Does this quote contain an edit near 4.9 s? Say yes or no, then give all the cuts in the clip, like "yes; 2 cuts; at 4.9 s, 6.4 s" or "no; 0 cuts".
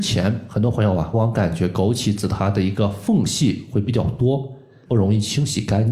yes; 2 cuts; at 1.1 s, 4.9 s